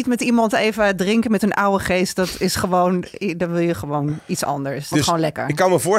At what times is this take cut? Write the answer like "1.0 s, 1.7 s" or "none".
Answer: 4.9 s